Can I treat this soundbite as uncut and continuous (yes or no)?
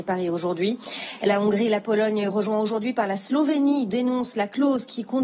yes